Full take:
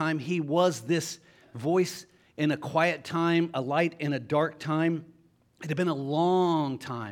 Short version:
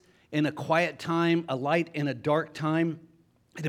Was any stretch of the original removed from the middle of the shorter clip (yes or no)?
no